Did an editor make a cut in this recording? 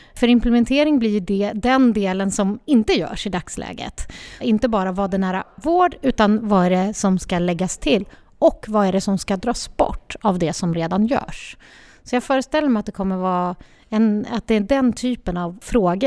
yes; 1 cut; at 4.4 s

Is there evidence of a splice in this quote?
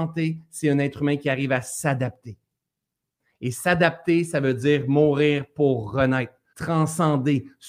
yes; 1 cut; at 6.5 s

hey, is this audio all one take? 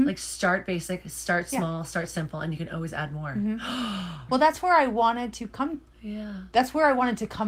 no; 1 cut; at 4.3 s

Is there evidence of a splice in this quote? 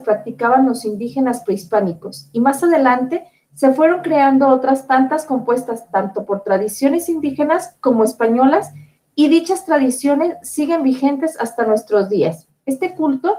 yes; 1 cut; at 12.5 s

